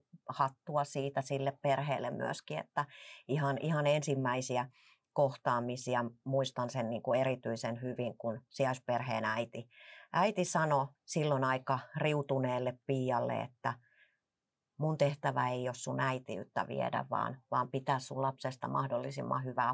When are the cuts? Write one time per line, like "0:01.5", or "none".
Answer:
0:11.0

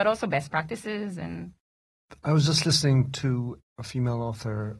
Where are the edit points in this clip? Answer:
0:03.6

